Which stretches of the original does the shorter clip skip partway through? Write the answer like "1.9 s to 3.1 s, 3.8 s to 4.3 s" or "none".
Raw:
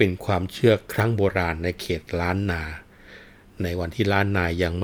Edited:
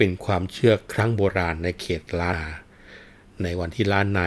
2.3 s to 2.5 s

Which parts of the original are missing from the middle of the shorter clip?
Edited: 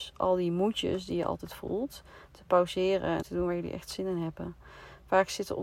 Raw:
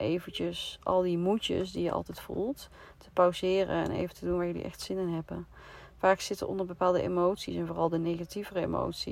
3.9 s to 4.1 s

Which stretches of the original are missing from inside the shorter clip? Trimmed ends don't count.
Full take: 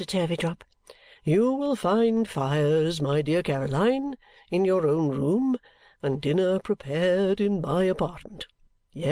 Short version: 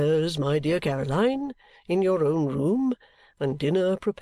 none

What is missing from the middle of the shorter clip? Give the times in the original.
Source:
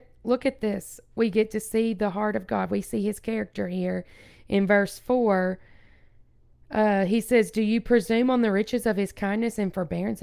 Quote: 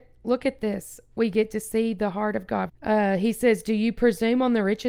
2.7 s to 6.6 s

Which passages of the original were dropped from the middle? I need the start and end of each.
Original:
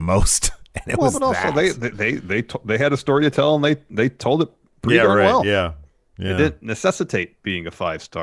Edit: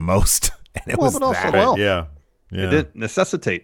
1.5 s to 5.2 s

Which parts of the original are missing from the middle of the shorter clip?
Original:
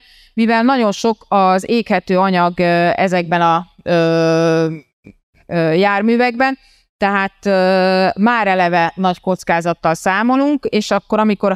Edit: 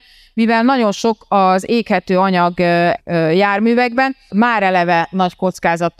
3.0 s to 5.4 s, 6.7 s to 8.1 s

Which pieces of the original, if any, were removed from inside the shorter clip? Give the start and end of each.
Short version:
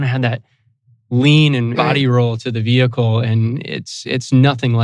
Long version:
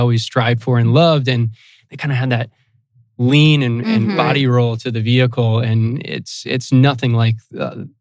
3.8 s to 4.2 s

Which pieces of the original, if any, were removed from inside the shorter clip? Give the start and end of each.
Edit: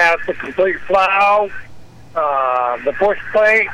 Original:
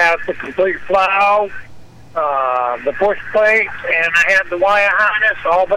none

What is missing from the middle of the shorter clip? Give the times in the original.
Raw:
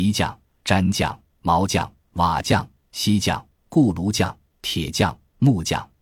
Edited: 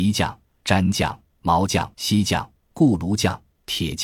1.9 s to 2.9 s

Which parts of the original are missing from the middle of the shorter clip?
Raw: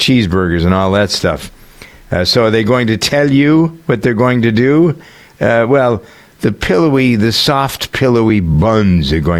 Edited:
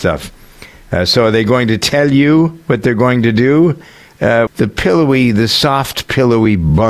5.7 s to 6.3 s

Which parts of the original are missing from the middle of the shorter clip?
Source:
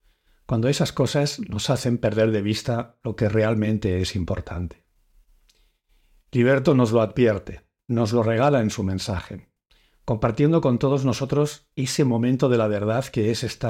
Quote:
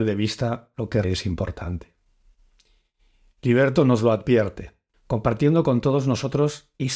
3.3 s to 3.9 s, 7.8 s to 9.9 s

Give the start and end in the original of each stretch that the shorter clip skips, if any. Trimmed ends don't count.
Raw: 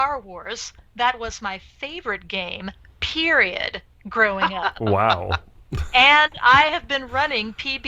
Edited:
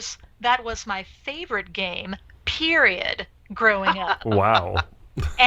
none

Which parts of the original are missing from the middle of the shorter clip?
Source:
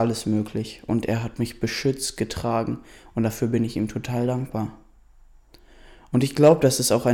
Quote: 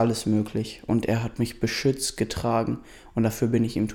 none

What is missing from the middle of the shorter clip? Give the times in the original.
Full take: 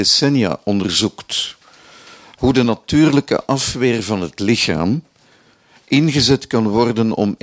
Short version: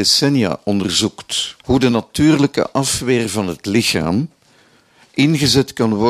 1.6 s to 2.3 s

